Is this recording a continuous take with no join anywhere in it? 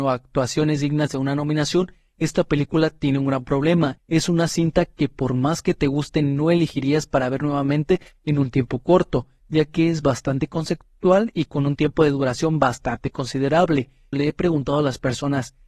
no; 2 cuts; at 4.0 s, 14.1 s

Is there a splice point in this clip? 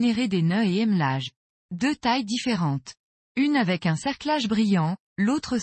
yes; 1 cut; at 1.6 s

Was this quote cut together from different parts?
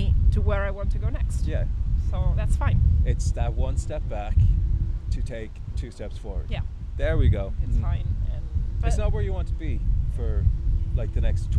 yes; 1 cut; at 7.6 s

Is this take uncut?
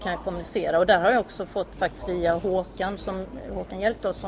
yes; 0 cuts

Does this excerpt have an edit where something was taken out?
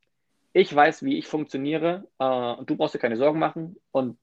no; 0 cuts

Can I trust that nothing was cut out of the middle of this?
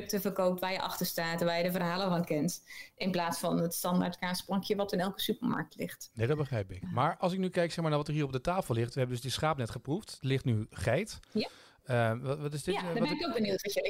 yes; 0 cuts

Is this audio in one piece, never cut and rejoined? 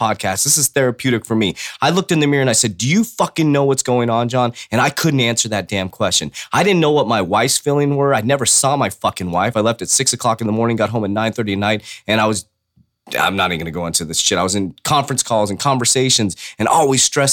yes; 0 cuts

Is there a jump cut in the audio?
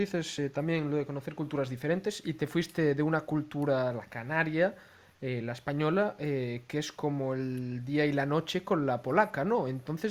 no; 0 cuts

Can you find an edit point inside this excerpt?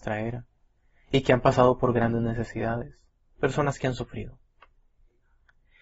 no; 0 cuts

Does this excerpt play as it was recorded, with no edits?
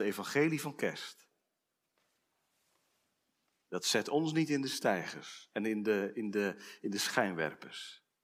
yes; 0 cuts

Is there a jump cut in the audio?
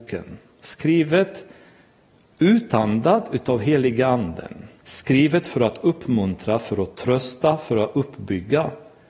yes; 1 cut; at 4.8 s

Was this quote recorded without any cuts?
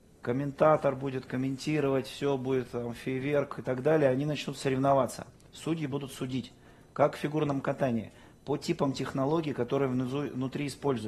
yes; 0 cuts

